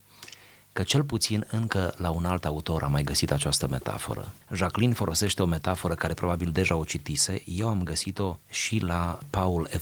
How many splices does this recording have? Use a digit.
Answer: 2